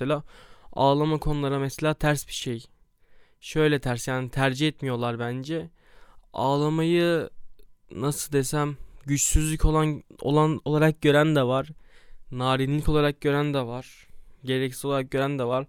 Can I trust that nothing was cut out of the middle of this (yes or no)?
yes